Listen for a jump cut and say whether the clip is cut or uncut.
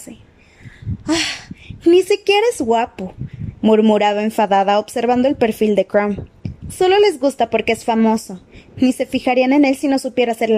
uncut